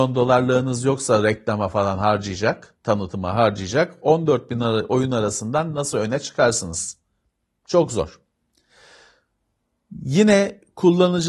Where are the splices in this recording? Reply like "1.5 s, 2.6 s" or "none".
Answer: none